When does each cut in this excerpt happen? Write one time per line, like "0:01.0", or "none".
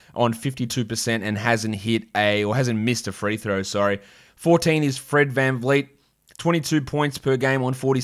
0:04.3